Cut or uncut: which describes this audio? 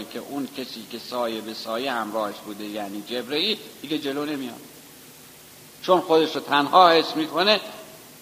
cut